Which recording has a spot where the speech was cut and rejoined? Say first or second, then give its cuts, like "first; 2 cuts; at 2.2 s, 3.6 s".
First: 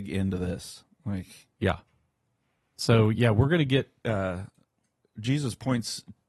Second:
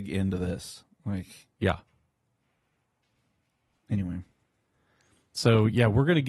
first; 2 cuts; at 2.7 s, 4.0 s